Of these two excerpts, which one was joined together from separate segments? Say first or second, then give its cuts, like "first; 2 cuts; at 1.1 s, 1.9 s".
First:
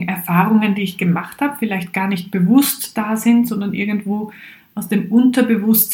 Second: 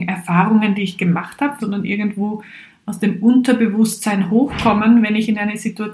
second; 1 cut; at 1.6 s